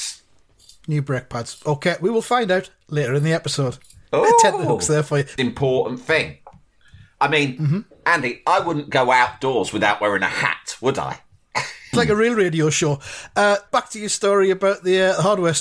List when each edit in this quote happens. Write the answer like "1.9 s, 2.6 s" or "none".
5.4 s, 11.9 s, 13.7 s